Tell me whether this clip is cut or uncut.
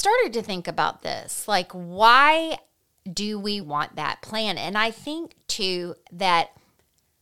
cut